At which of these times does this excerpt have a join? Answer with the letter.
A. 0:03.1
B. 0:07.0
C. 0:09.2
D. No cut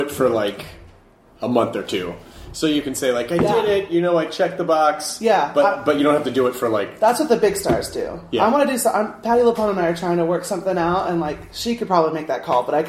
D